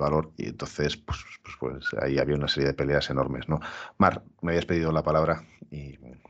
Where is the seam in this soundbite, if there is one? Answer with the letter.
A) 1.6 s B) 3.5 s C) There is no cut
C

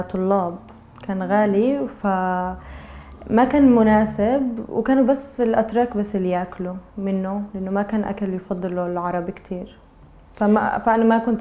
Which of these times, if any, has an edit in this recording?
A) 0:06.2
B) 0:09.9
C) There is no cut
C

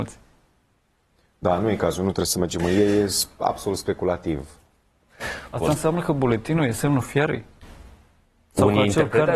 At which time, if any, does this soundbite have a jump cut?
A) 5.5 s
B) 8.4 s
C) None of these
A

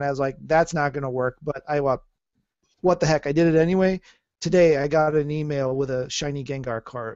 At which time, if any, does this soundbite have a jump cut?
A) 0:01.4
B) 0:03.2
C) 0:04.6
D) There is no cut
D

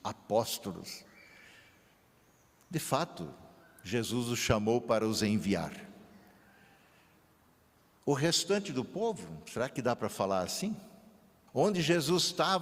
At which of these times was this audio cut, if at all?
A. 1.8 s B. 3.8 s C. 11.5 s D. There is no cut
C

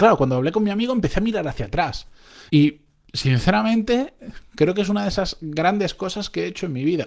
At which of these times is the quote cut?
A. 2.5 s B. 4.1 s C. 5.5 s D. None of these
A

